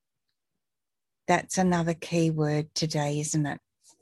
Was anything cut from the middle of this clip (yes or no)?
yes